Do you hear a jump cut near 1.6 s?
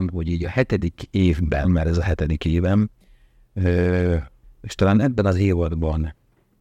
yes; 2 cuts; at 1.6 s, 4.4 s

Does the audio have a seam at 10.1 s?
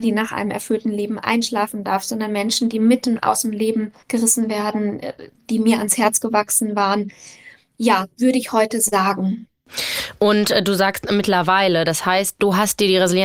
no; 1 cut; at 4.0 s

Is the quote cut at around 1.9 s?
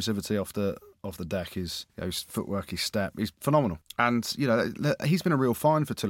yes; 1 cut; at 1.9 s

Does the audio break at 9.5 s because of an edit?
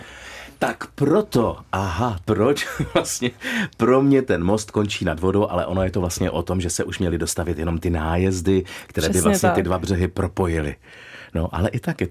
no; 1 cut; at 2.2 s

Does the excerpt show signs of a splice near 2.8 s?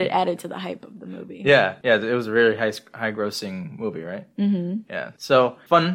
no; 0 cuts

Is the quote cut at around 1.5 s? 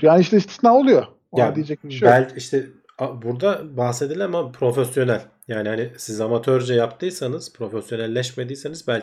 no; 0 cuts

